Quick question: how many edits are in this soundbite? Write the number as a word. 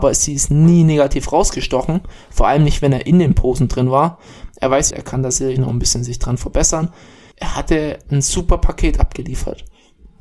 two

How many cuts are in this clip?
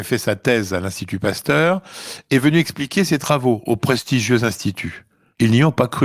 zero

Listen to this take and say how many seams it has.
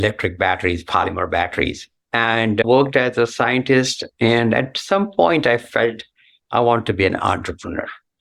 one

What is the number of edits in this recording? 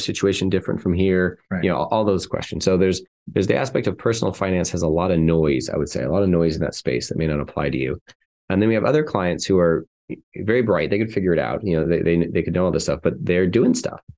zero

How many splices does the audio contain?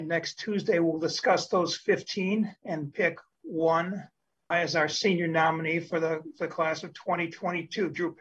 one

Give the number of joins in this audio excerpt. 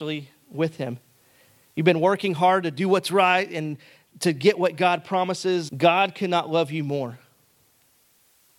one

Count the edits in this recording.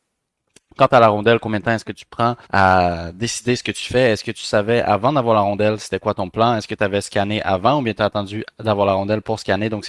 one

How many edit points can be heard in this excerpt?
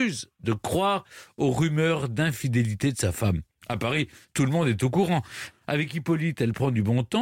one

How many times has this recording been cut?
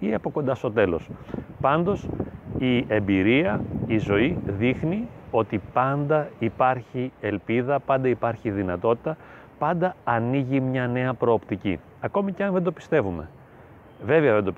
zero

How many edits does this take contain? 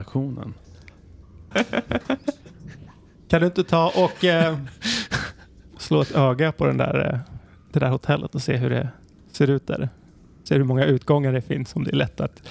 one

